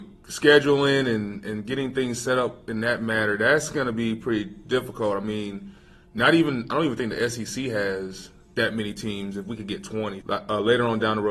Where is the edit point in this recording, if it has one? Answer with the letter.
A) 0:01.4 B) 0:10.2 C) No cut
B